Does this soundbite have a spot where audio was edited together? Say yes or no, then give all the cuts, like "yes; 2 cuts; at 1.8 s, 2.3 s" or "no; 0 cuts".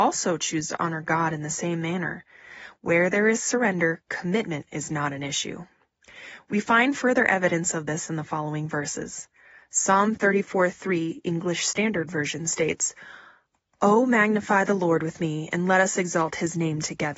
no; 0 cuts